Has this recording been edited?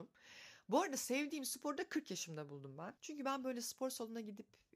yes; 1 cut; at 3.0 s

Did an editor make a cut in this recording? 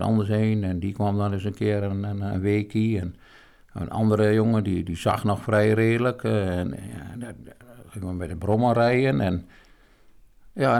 no; 0 cuts

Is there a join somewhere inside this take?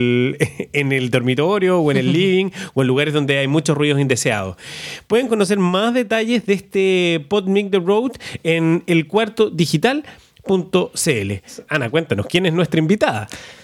no; 0 cuts

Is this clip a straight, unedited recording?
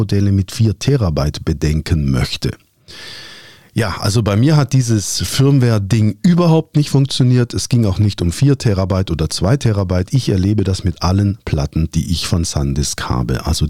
yes; 0 cuts

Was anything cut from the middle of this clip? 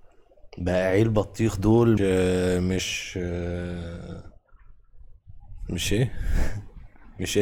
yes; 1 cut; at 2.0 s

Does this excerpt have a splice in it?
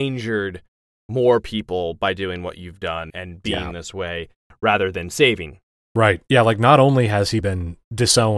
yes; 2 cuts; at 3.1 s, 7.4 s

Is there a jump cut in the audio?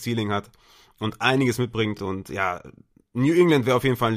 no; 0 cuts

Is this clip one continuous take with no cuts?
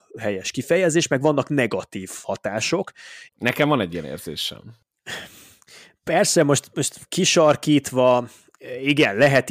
no; 1 cut; at 3.3 s

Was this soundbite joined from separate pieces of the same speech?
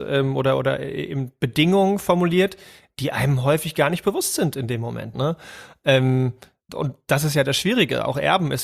yes; 2 cuts; at 5.1 s, 6.7 s

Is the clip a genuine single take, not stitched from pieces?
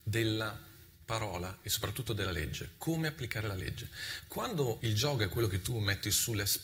no; 1 cut; at 4.8 s

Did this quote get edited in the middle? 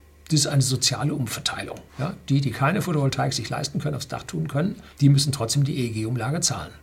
yes; 2 cuts; at 1.9 s, 4.9 s

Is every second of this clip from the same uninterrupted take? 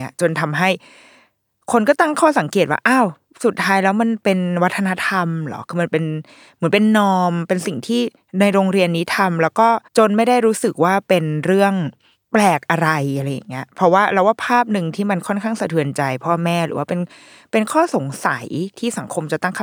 no; 1 cut; at 9.9 s

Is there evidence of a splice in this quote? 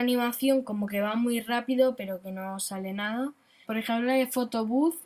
yes; 1 cut; at 3.6 s

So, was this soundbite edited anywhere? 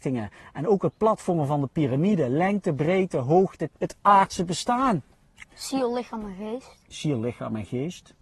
yes; 1 cut; at 3.7 s

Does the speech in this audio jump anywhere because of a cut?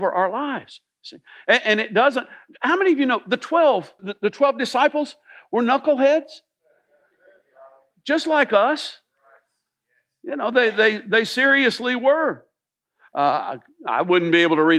yes; 2 cuts; at 4.0 s, 13.1 s

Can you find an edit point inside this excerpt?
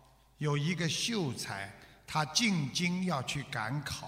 no; 0 cuts

